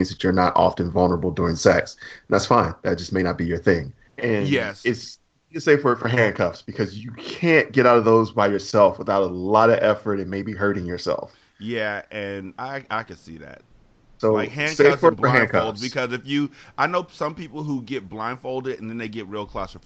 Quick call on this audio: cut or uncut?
cut